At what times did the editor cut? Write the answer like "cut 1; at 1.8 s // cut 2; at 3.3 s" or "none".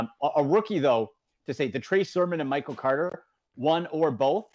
none